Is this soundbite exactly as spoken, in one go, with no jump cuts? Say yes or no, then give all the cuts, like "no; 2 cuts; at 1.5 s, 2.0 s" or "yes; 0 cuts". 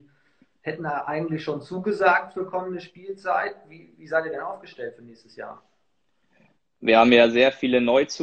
yes; 0 cuts